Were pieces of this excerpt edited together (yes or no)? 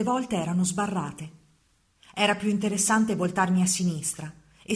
no